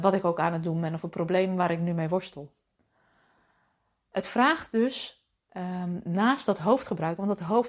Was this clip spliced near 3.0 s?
no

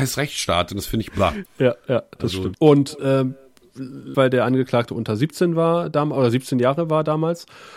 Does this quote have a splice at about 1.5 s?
yes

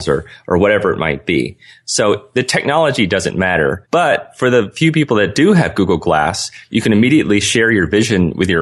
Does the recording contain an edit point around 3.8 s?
yes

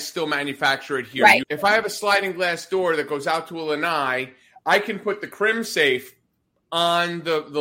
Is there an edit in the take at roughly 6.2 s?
no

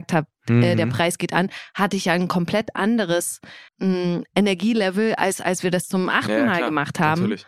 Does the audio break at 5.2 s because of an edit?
no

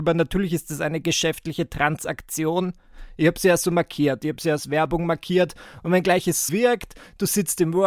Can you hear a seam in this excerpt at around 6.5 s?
yes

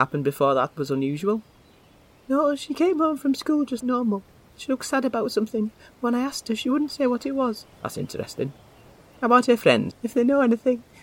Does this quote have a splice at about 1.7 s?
no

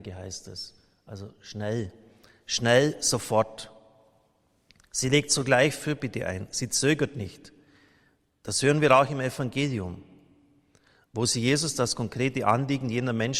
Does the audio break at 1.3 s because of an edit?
no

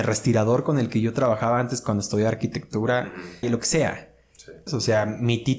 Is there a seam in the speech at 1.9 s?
no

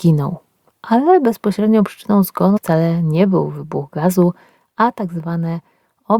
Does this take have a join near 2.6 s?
yes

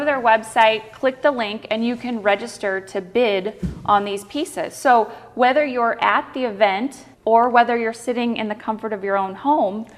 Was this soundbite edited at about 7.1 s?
yes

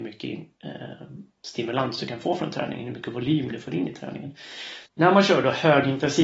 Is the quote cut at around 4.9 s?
yes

